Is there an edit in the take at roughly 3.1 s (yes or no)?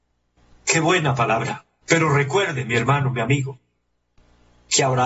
no